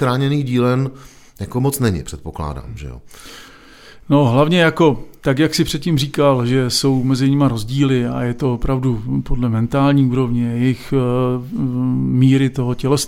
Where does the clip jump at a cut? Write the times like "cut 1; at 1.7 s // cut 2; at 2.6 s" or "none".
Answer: none

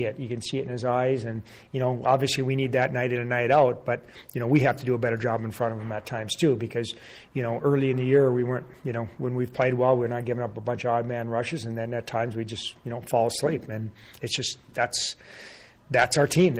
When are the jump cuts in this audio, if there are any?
none

